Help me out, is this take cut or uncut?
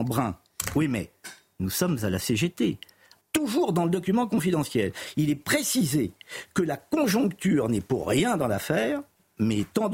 cut